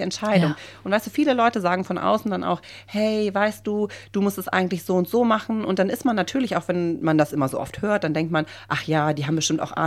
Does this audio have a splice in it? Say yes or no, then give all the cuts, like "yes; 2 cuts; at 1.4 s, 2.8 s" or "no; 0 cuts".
no; 0 cuts